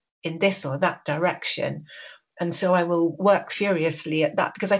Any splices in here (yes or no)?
no